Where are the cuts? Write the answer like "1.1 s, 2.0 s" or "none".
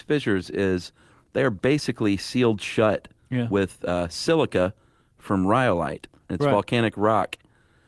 none